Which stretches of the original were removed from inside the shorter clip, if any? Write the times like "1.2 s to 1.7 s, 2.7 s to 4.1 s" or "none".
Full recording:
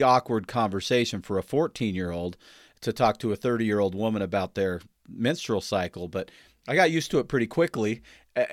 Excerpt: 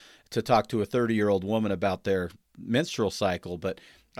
none